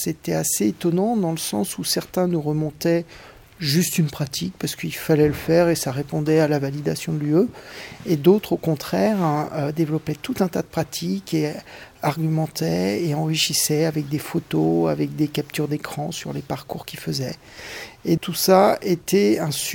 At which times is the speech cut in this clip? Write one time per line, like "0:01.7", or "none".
0:18.2